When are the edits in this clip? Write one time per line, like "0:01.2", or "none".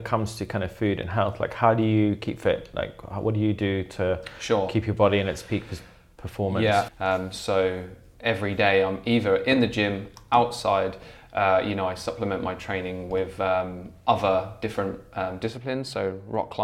0:06.9